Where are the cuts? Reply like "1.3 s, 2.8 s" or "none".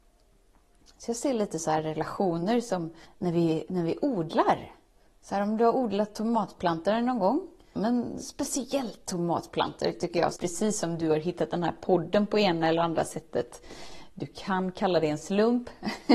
3.1 s, 7.8 s, 10.4 s

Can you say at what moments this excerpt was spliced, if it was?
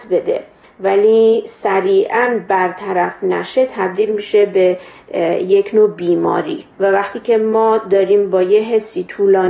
6.7 s

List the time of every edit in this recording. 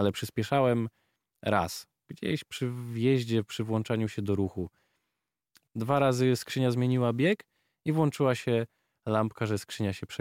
5.7 s

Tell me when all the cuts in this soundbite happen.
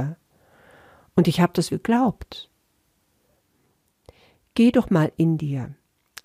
1.7 s

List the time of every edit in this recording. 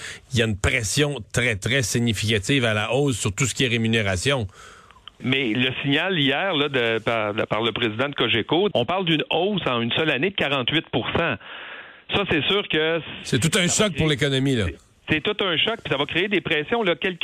1.2 s, 5.2 s, 8.7 s

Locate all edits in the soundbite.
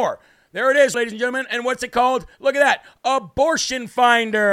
0.9 s

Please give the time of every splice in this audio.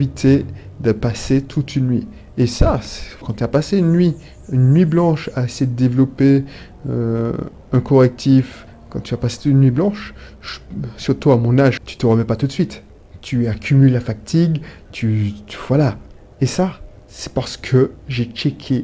3.2 s, 11.8 s

